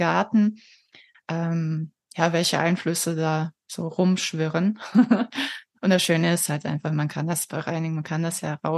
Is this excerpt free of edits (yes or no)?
no